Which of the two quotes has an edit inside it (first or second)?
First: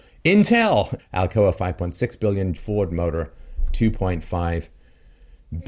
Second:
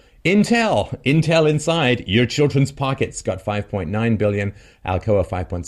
first